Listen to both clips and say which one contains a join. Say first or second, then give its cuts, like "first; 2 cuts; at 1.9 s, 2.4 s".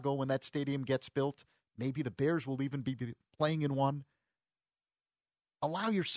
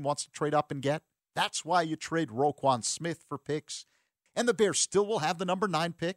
second; 2 cuts; at 1.2 s, 4.3 s